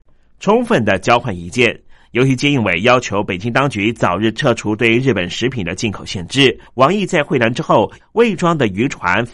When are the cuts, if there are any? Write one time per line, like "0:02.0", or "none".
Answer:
0:06.7
0:08.0

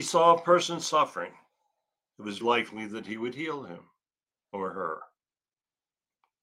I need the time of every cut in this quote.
0:02.4

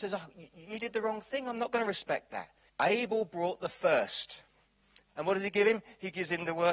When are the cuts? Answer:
0:02.7
0:05.1

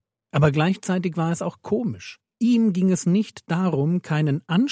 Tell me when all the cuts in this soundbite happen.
0:02.3

